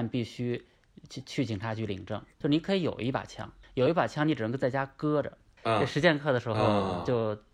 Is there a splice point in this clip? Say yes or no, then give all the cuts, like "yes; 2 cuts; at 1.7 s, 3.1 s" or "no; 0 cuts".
yes; 3 cuts; at 2.4 s, 3.6 s, 5.6 s